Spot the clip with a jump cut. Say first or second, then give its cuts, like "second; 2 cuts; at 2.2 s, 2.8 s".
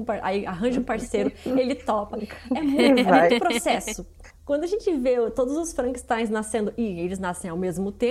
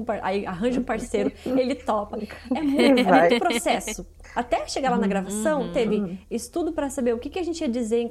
first; 1 cut; at 4.3 s